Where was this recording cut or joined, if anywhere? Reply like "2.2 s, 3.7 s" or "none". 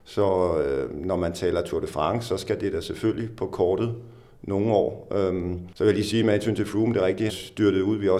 5.7 s, 7.3 s

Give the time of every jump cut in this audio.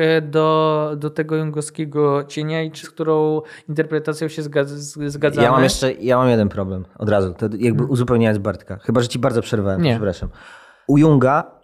2.8 s

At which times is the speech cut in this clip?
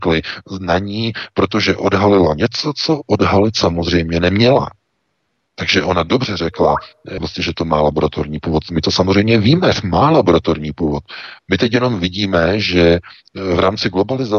5.5 s, 7.2 s

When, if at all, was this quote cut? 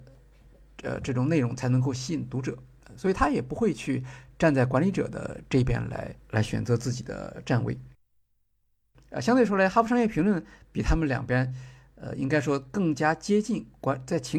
none

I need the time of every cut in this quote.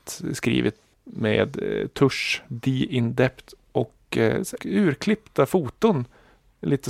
0.9 s, 4.6 s

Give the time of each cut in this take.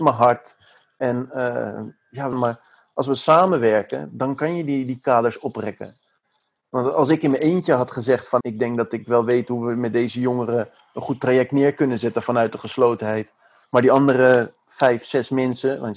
2.3 s, 8.4 s

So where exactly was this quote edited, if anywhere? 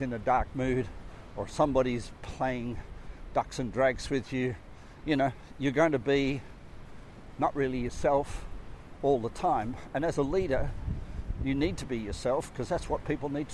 none

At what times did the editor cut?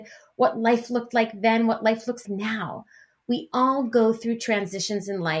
2.2 s

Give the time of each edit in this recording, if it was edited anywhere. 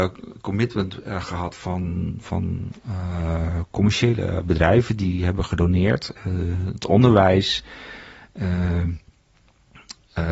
none

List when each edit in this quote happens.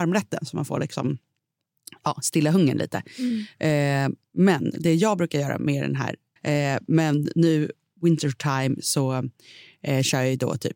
6.4 s

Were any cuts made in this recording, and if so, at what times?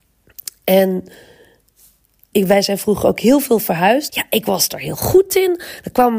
2.3 s, 4.1 s

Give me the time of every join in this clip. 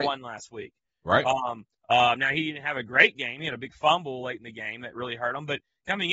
1.7 s

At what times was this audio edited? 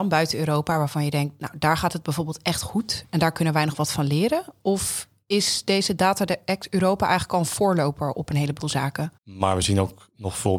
9.2 s

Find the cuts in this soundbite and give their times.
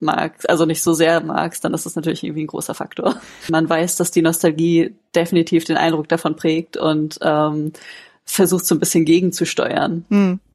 3.5 s

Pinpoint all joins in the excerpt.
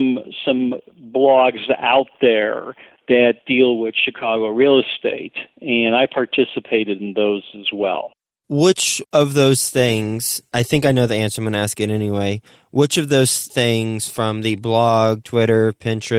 15.2 s

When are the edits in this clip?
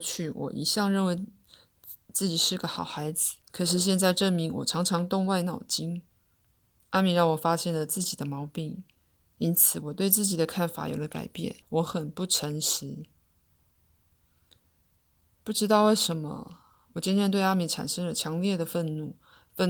3.4 s, 11.6 s

